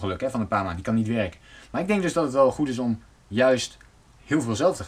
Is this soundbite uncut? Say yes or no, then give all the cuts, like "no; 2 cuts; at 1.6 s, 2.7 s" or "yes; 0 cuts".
no; 1 cut; at 1.6 s